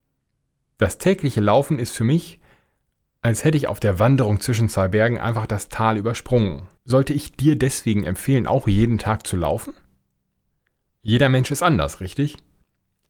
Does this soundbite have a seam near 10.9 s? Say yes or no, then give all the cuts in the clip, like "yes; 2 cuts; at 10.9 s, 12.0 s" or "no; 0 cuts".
no; 1 cut; at 6.8 s